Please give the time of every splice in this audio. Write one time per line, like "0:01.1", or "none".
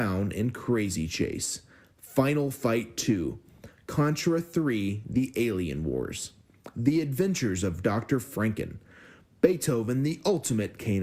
none